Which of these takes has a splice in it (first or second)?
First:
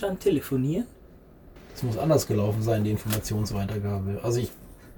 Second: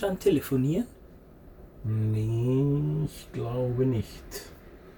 first